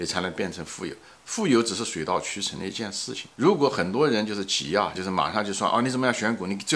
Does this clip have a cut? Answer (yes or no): yes